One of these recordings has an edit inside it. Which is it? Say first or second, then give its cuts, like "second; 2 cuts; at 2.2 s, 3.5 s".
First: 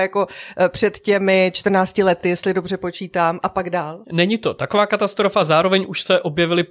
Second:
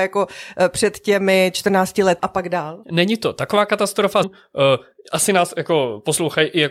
second; 2 cuts; at 2.2 s, 4.2 s